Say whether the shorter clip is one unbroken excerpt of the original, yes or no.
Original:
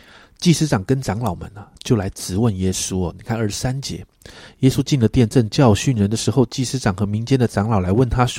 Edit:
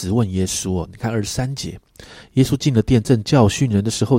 yes